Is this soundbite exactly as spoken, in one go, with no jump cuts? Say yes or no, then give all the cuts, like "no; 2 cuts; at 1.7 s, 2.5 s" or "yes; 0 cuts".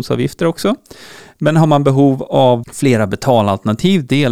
no; 1 cut; at 2.6 s